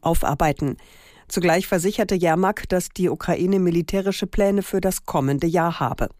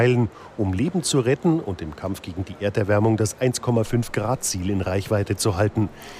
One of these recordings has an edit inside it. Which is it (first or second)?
first